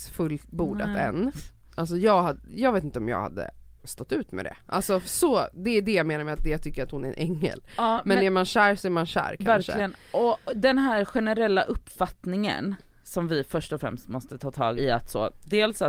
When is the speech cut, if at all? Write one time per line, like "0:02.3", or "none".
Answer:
0:14.8